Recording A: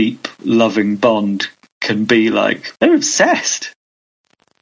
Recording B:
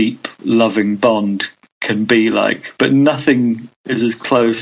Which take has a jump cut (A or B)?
A